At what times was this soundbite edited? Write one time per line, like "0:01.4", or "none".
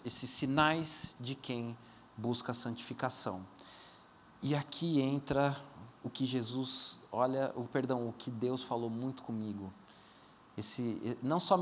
none